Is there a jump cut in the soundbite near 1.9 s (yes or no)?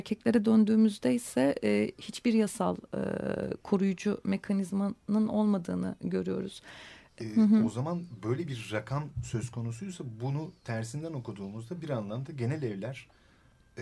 no